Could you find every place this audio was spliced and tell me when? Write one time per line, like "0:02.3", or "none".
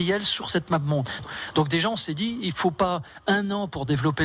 0:01.2